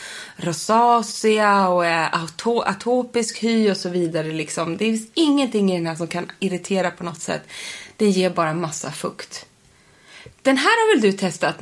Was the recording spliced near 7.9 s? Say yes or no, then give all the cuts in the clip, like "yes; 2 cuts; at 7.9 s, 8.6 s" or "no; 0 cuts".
no; 0 cuts